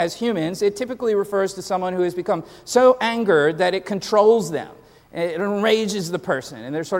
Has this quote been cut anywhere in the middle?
no; 0 cuts

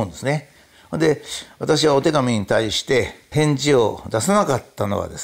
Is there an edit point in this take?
yes; 1 cut; at 3.3 s

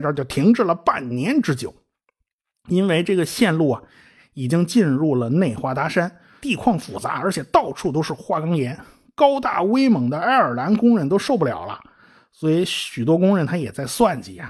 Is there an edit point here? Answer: yes; 1 cut; at 6.4 s

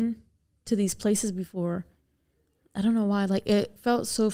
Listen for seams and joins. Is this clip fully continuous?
yes; 0 cuts

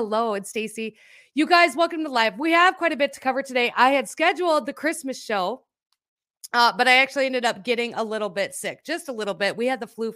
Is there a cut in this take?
no; 0 cuts

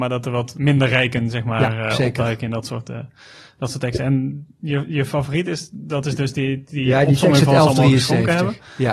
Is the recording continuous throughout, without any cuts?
yes; 0 cuts

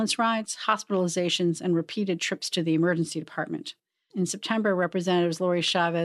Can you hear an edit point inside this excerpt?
yes; 1 cut; at 4.1 s

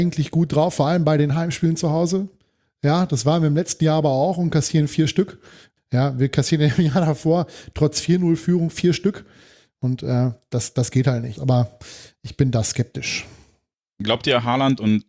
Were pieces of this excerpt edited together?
yes; 2 cuts; at 5.8 s, 11.4 s

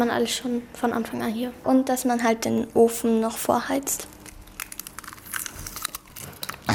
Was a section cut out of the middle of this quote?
no; 0 cuts

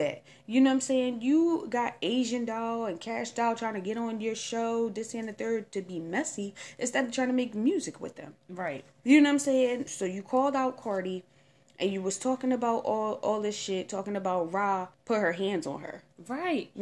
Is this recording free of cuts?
no; 2 cuts; at 9.9 s, 14.9 s

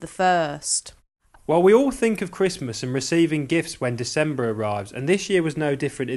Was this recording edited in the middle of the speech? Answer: yes; 1 cut; at 1.3 s

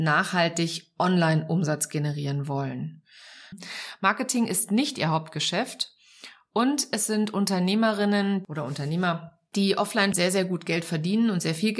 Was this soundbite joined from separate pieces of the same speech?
yes; 2 cuts; at 3.5 s, 10.1 s

